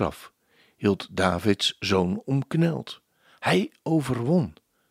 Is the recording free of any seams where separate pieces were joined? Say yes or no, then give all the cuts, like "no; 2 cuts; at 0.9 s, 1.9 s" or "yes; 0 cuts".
yes; 0 cuts